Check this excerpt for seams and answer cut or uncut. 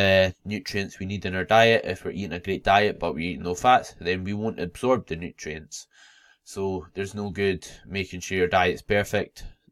uncut